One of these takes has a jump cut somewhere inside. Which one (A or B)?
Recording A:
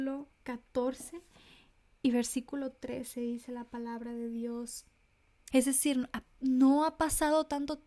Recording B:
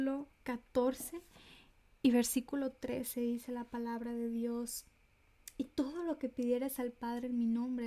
A